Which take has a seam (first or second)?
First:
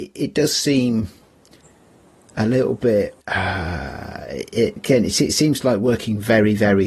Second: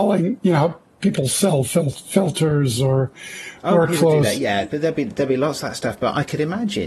first